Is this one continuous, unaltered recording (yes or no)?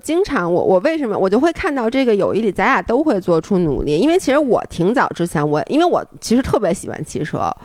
yes